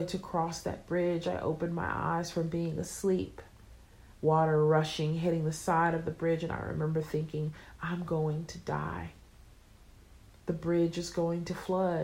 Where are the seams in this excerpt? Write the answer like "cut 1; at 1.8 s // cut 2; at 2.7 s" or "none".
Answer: cut 1; at 4.1 s